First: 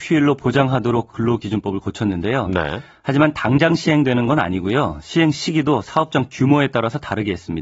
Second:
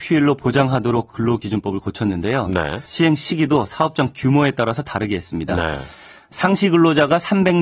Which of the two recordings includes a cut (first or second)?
second